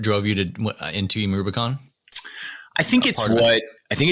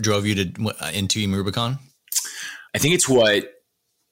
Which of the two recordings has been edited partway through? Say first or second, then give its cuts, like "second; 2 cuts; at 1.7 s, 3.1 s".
second; 1 cut; at 2.7 s